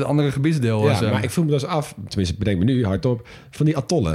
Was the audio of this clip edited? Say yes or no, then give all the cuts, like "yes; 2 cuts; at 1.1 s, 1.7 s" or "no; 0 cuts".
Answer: no; 0 cuts